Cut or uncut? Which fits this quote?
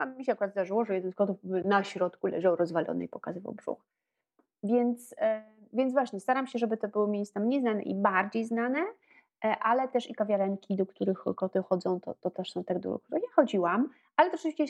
uncut